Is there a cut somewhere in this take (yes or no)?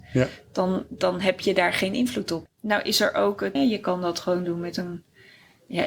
yes